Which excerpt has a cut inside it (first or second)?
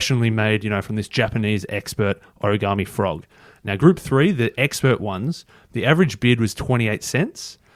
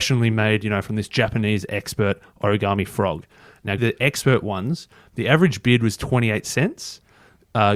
second